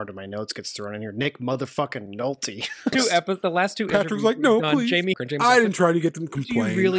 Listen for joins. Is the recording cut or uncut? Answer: cut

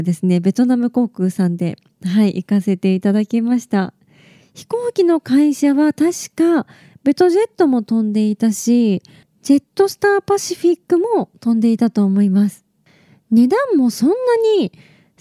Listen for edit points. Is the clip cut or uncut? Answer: uncut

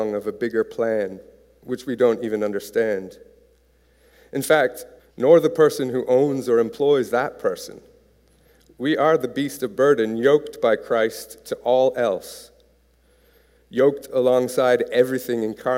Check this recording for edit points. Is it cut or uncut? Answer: cut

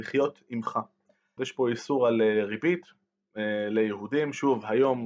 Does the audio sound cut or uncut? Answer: cut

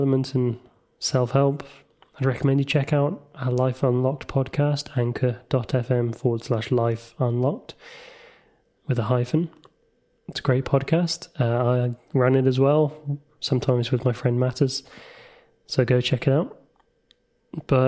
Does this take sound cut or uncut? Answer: uncut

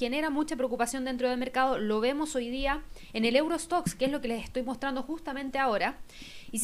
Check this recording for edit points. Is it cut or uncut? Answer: uncut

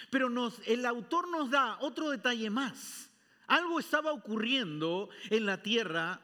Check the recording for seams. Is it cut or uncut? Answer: uncut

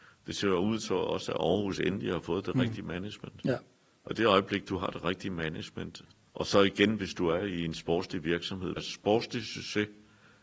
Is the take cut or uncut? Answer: cut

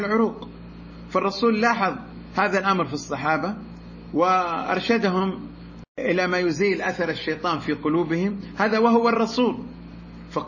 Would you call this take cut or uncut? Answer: cut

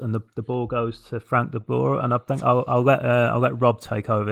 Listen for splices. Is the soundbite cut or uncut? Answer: uncut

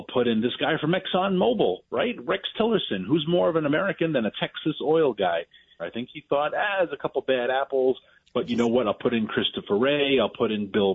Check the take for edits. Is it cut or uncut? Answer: cut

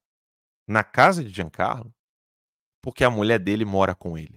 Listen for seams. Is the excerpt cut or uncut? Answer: uncut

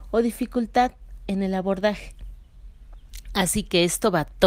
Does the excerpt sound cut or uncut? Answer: uncut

